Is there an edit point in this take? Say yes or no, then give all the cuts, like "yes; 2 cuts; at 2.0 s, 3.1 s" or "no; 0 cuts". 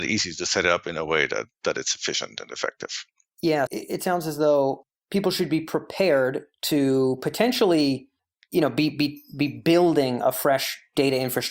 yes; 1 cut; at 3.7 s